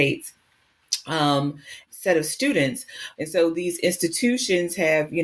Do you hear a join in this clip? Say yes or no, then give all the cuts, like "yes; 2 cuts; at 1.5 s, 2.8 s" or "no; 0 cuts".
yes; 2 cuts; at 1.9 s, 3.1 s